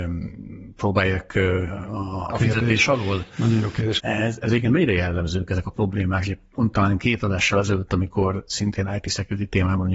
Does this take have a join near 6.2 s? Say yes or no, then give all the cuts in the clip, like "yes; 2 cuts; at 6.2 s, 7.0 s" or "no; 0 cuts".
no; 2 cuts; at 2.3 s, 4.0 s